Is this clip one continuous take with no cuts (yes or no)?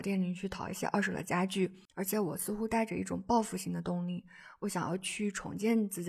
no